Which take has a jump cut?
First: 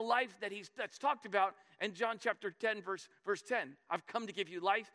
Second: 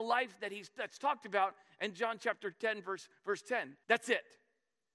second; 1 cut; at 3.8 s

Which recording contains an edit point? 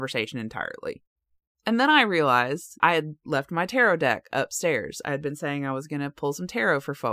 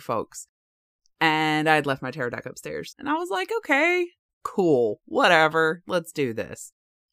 second; 1 cut; at 2.9 s

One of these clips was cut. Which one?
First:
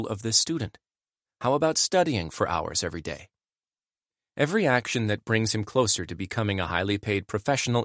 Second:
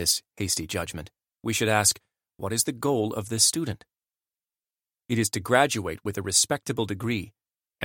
first; 1 cut; at 1.2 s

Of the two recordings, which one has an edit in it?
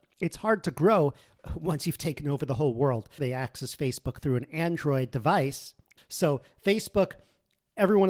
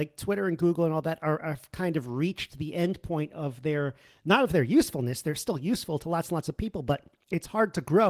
first; 2 cuts; at 3.2 s, 6.0 s

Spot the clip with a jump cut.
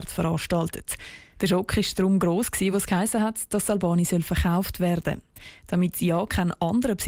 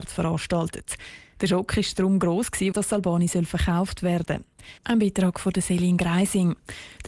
second; 2 cuts; at 2.7 s, 4.8 s

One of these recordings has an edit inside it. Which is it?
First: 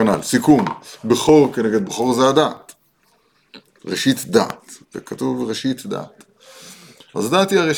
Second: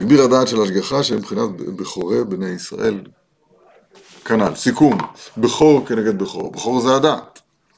first; 2 cuts; at 1.8 s, 4.8 s

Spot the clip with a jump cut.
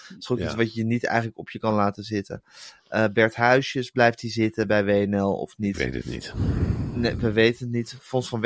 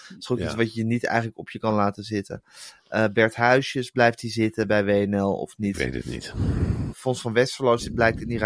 second; 1 cut; at 6.9 s

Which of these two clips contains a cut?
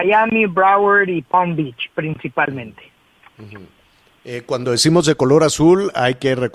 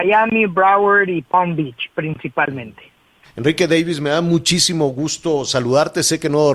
second; 1 cut; at 3.2 s

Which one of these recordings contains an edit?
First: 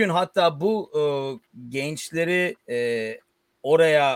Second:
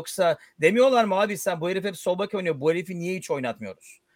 first; 1 cut; at 2.6 s

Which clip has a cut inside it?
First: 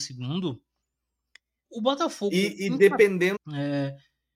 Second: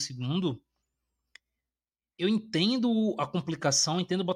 first; 2 cuts; at 1.6 s, 3.4 s

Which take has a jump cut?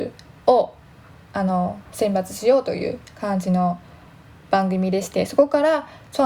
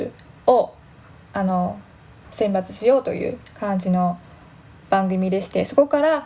first; 1 cut; at 1.8 s

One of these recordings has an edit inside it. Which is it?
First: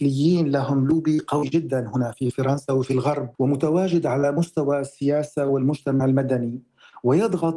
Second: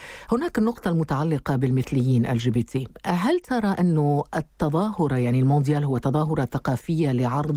first; 1 cut; at 3.3 s

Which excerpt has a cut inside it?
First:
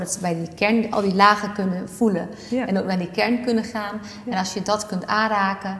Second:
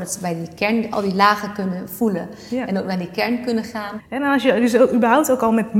second; 1 cut; at 4.0 s

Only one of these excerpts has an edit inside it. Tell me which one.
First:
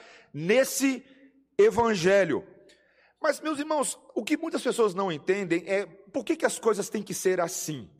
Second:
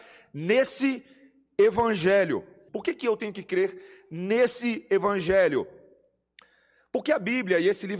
second; 1 cut; at 2.7 s

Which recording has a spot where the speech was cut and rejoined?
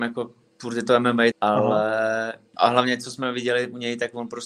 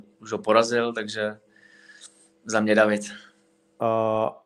first; 1 cut; at 1.3 s

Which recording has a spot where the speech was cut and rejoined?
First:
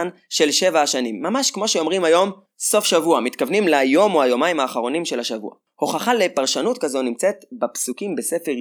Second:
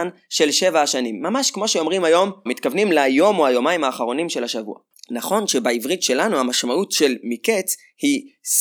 second; 2 cuts; at 2.5 s, 4.9 s

